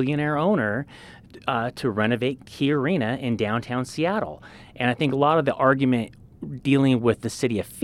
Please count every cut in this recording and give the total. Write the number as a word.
two